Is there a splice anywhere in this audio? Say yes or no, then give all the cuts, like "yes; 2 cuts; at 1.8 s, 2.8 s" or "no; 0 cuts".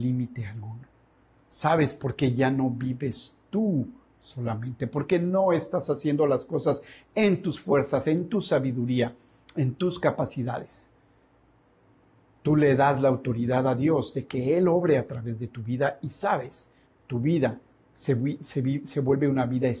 no; 0 cuts